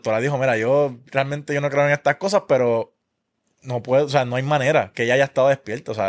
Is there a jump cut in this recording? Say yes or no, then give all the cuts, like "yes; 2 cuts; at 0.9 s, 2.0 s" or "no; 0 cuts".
no; 0 cuts